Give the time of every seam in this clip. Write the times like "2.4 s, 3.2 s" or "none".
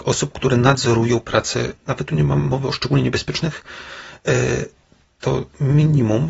1.8 s